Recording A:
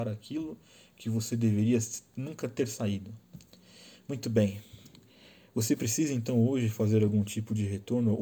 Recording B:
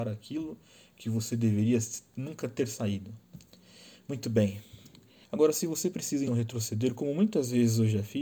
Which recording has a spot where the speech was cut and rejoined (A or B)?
B